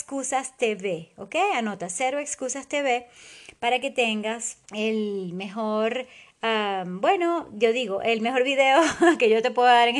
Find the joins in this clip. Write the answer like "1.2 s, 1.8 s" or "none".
4.6 s